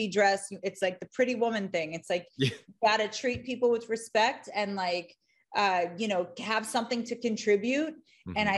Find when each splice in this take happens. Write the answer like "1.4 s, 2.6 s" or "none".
none